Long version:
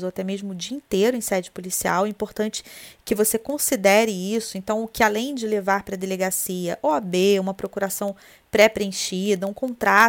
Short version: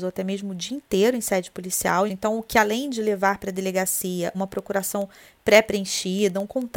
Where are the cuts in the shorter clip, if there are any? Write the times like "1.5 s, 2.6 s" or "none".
2.1 s, 4.3 s